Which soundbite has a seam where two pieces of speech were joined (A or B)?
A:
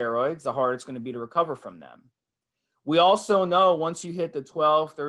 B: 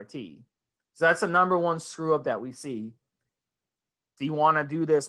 B